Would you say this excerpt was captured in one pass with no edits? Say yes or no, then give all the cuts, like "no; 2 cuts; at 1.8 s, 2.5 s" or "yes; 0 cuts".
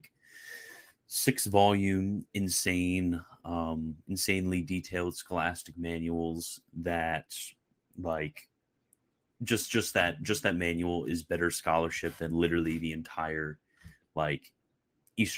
yes; 0 cuts